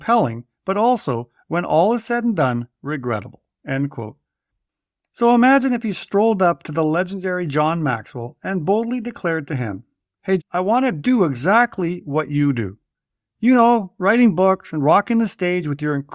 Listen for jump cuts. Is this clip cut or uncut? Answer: cut